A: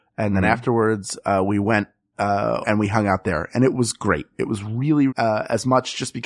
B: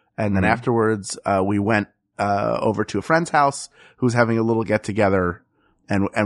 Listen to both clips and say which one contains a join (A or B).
A